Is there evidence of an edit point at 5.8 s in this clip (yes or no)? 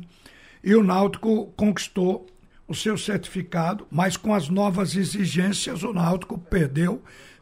no